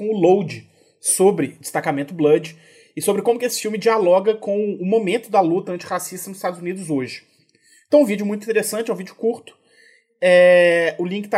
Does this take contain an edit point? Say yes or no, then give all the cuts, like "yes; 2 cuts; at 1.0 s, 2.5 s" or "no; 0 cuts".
no; 0 cuts